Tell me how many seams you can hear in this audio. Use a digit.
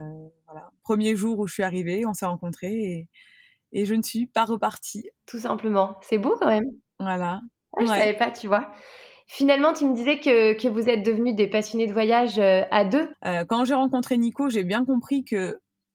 1